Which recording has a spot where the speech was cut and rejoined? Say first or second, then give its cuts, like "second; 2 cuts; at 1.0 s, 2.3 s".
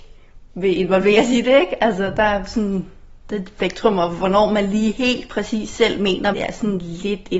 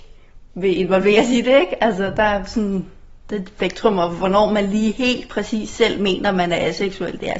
first; 1 cut; at 6.3 s